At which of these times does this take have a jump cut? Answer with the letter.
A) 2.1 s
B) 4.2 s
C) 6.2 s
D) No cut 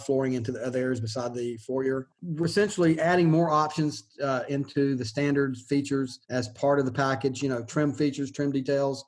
C